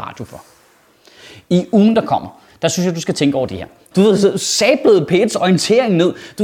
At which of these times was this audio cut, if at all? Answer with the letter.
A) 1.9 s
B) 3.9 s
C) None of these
B